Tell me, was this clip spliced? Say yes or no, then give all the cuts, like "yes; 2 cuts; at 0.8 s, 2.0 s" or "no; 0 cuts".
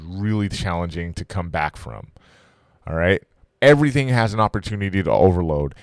yes; 1 cut; at 3.5 s